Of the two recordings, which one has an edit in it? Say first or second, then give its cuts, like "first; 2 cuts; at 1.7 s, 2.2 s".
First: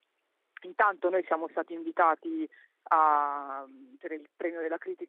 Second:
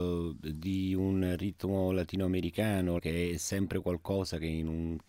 second; 1 cut; at 3.0 s